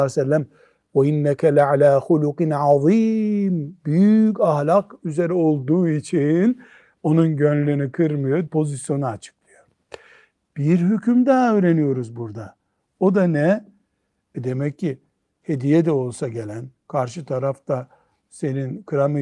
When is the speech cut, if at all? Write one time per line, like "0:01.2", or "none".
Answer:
0:08.5